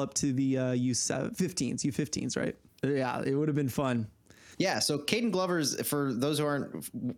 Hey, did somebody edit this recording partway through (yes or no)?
yes